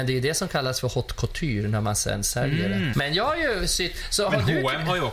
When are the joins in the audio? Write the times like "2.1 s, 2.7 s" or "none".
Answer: 2.9 s